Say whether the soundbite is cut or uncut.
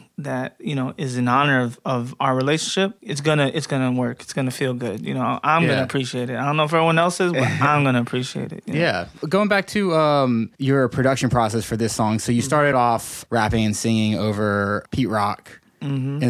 uncut